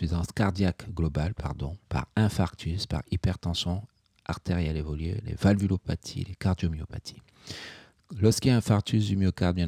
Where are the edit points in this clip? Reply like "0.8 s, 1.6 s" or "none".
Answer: 1.9 s